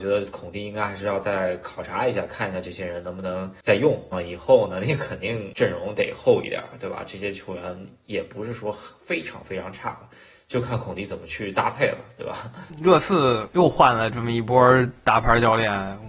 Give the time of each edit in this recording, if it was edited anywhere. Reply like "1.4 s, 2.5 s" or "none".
4.1 s